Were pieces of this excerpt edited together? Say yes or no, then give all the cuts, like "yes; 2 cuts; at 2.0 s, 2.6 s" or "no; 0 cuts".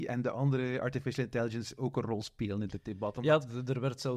no; 0 cuts